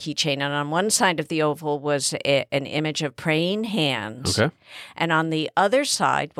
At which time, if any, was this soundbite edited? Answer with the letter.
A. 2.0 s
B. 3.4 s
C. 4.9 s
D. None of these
D